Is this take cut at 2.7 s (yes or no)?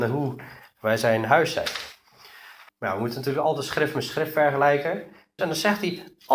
yes